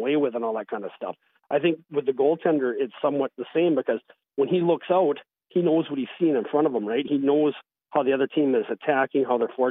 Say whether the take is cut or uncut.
uncut